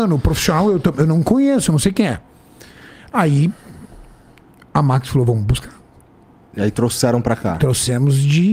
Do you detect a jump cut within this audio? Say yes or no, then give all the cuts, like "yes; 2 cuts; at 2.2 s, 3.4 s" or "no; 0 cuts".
no; 0 cuts